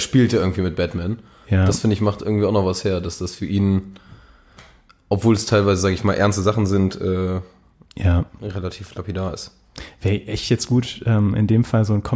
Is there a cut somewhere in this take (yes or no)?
no